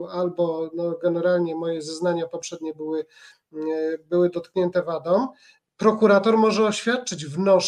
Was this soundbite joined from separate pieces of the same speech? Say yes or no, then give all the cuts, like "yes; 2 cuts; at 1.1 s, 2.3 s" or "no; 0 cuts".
no; 0 cuts